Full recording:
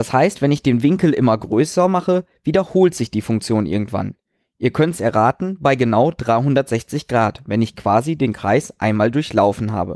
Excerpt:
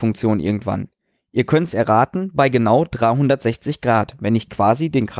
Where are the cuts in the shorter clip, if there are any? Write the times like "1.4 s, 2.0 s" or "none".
none